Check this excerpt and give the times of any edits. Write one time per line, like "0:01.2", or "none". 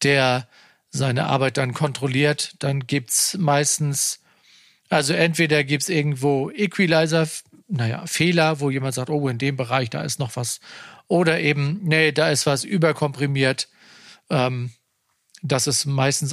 none